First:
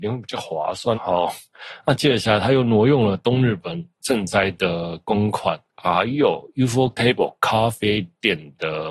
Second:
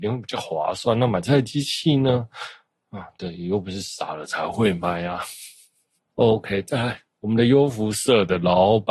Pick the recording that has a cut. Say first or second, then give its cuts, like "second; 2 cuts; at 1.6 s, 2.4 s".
first; 2 cuts; at 0.9 s, 5.7 s